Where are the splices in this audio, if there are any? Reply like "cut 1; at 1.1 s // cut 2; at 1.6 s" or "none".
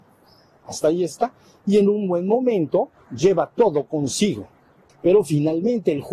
cut 1; at 4.9 s